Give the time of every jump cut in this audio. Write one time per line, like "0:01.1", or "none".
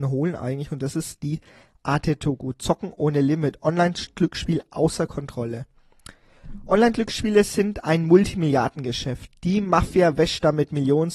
none